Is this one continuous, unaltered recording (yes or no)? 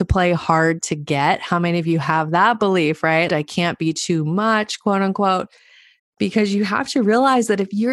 no